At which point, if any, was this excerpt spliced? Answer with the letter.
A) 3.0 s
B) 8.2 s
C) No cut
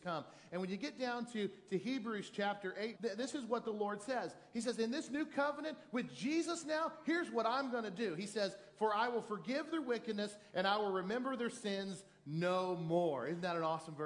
A